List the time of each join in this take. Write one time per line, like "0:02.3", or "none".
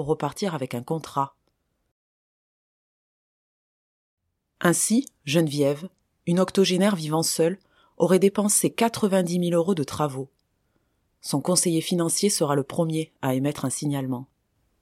none

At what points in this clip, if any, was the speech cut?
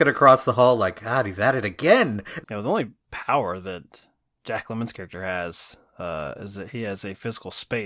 0:02.4

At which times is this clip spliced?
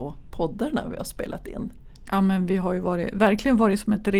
0:02.1

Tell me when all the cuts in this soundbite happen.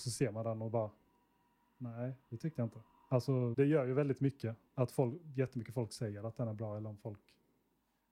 0:03.5

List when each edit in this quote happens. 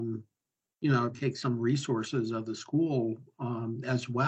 0:01.1

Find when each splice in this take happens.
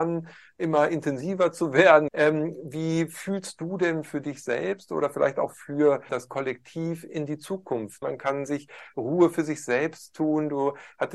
0:02.1
0:06.1
0:08.0

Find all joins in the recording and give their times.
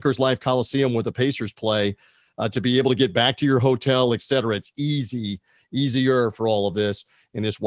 none

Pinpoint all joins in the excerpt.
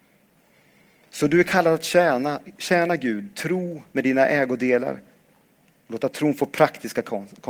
none

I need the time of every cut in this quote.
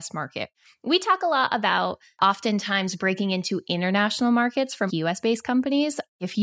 0:04.9

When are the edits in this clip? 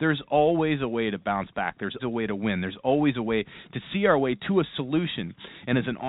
0:02.0

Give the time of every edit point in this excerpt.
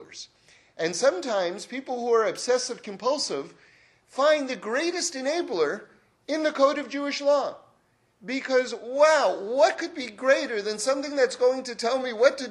none

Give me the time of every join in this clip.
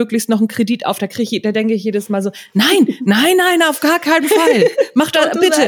none

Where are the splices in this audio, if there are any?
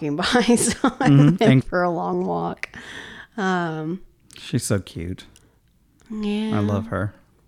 0:01.6

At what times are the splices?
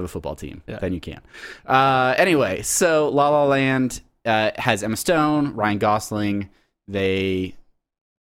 none

